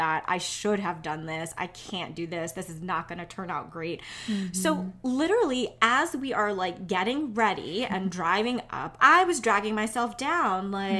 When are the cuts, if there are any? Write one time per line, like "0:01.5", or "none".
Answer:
0:09.0